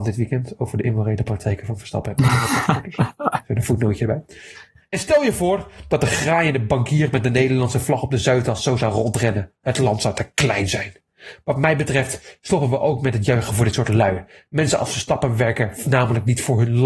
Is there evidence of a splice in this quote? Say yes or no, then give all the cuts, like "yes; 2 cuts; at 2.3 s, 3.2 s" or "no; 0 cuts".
no; 0 cuts